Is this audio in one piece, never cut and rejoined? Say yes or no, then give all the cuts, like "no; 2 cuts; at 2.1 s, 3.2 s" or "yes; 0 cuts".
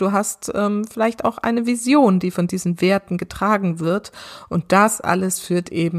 yes; 0 cuts